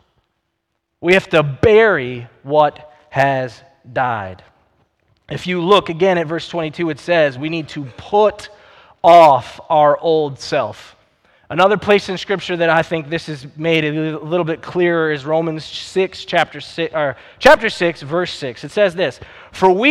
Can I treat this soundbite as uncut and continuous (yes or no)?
yes